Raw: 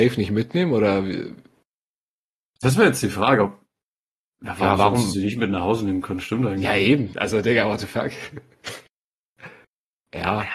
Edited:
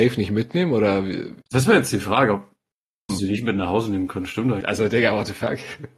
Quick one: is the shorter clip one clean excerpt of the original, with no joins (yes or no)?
no